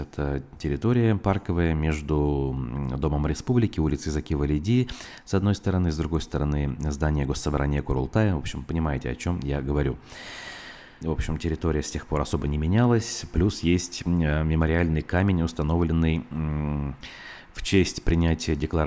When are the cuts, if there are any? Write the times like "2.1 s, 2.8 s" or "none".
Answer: 11.0 s